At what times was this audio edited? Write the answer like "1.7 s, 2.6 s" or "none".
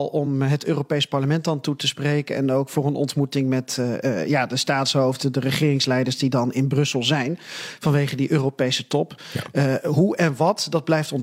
none

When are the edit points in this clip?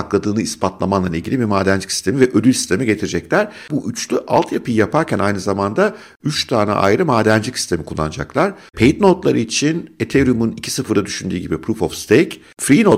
3.7 s, 8.7 s

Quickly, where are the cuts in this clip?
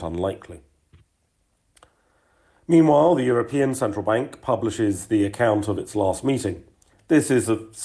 6.9 s

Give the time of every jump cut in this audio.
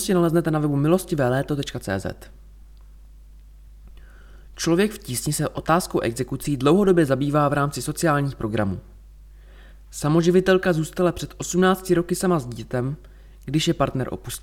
9.7 s

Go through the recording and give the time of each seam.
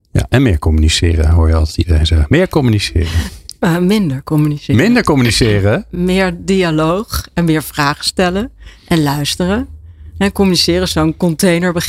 none

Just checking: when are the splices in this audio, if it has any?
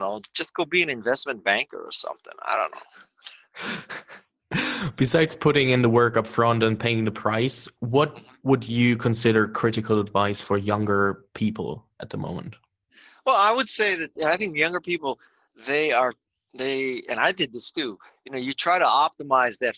none

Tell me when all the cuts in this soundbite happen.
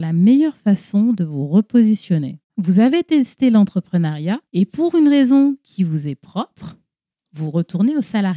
2.5 s, 4.5 s

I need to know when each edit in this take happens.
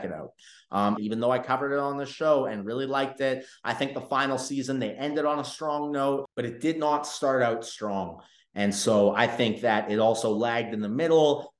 1.0 s

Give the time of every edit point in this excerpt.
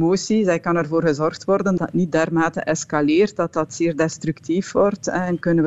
1.8 s

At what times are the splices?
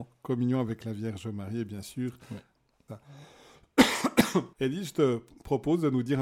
2.9 s, 4.5 s

